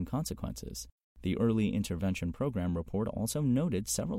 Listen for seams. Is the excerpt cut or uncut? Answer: uncut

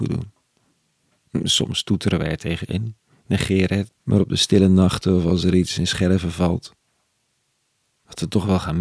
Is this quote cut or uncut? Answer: cut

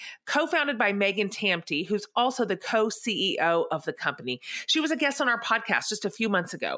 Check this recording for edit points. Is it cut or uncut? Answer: uncut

